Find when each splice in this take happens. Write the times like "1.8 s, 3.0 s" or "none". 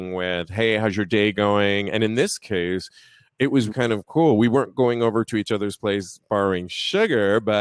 3.7 s